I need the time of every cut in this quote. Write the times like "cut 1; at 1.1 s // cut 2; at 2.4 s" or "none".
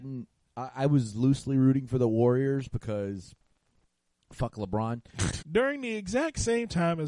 cut 1; at 5.4 s